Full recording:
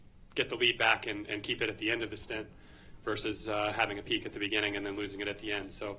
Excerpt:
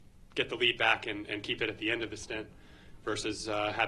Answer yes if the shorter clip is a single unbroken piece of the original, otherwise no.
yes